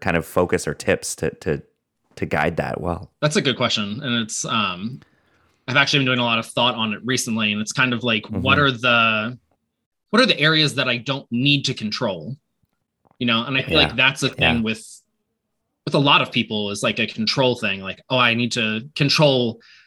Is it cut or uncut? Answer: uncut